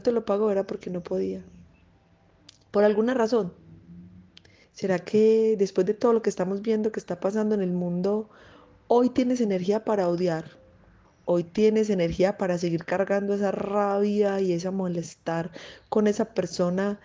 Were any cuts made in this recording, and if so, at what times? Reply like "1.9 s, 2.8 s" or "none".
4.6 s, 11.1 s